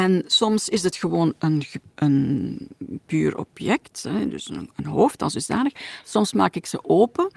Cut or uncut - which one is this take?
uncut